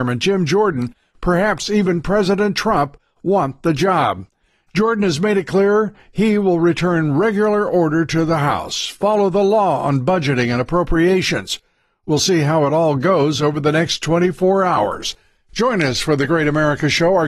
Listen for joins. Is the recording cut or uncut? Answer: uncut